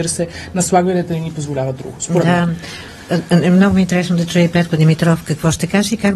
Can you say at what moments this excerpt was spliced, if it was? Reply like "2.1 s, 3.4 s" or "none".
none